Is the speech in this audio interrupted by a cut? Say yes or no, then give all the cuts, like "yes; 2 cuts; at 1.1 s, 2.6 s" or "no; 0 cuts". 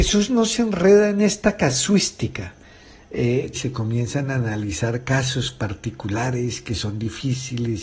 yes; 1 cut; at 3.5 s